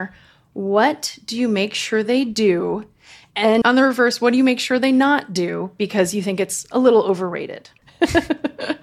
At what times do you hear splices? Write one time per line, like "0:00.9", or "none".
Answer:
0:03.6
0:07.8